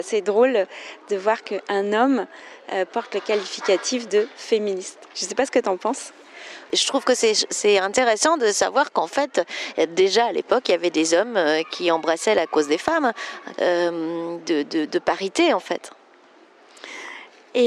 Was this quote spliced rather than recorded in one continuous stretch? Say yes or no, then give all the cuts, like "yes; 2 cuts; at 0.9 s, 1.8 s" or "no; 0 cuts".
yes; 1 cut; at 13.5 s